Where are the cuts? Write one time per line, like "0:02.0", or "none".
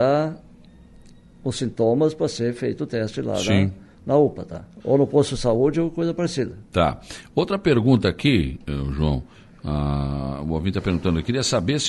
0:04.8

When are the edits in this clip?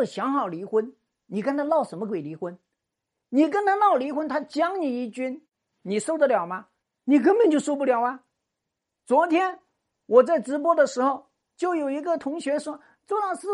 none

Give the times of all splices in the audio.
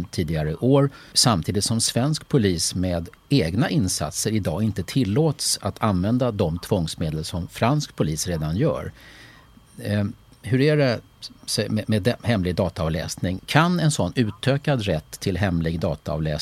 0:01.1
0:03.2
0:13.4

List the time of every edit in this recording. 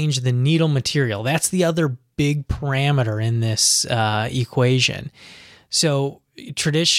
none

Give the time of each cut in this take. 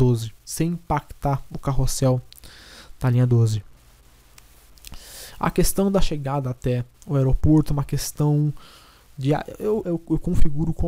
0:09.8

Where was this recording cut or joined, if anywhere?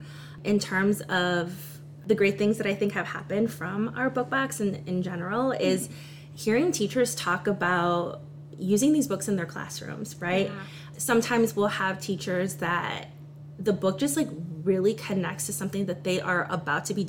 none

